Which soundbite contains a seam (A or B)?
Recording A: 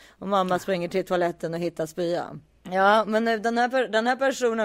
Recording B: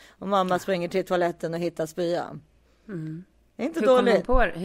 A